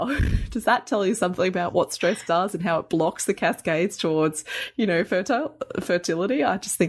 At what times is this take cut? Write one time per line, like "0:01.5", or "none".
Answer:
none